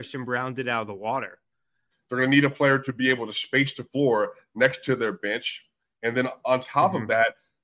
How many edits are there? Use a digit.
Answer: 1